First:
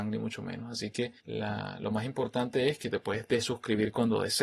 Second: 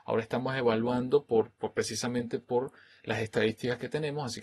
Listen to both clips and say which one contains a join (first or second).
first